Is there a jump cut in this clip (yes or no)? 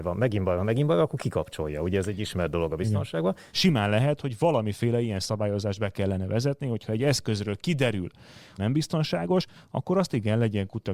yes